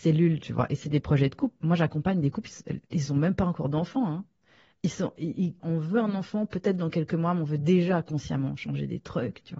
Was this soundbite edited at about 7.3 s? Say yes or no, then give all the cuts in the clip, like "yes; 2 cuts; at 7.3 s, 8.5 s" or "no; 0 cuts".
no; 1 cut; at 5.6 s